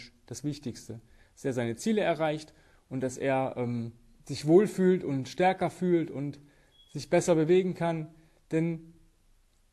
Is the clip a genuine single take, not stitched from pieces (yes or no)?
yes